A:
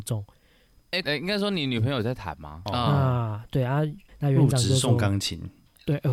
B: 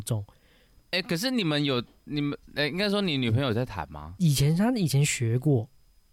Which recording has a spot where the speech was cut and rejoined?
A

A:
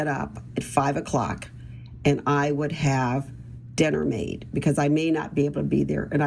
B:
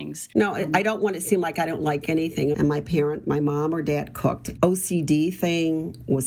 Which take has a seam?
B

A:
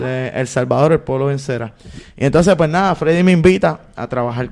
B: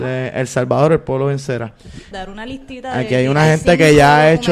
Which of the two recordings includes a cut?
B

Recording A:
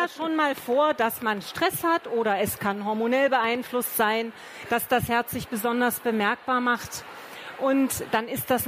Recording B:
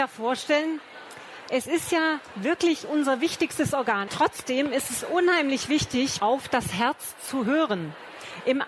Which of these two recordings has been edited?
B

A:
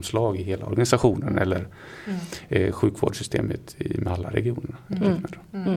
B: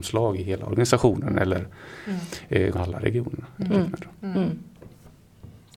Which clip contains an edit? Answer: B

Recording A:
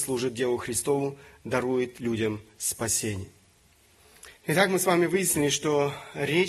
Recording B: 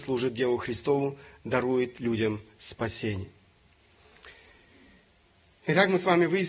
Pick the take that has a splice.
A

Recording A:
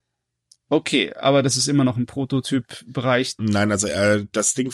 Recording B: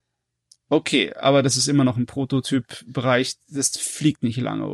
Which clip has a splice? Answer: A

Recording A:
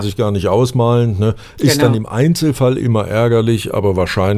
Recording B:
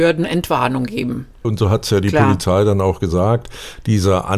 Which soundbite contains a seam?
B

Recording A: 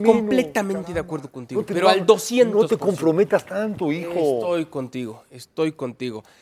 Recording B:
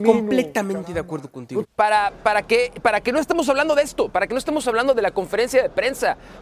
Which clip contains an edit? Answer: B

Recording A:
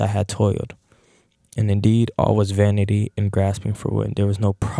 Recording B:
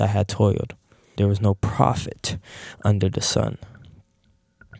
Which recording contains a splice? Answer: B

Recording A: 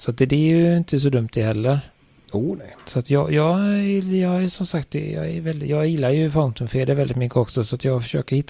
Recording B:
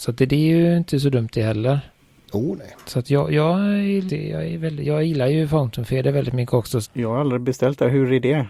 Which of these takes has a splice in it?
B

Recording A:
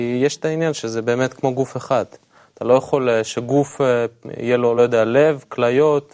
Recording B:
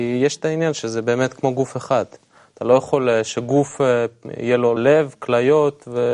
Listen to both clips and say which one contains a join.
B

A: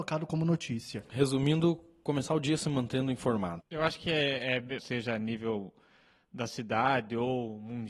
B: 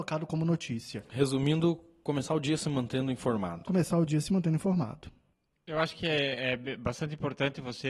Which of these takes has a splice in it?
A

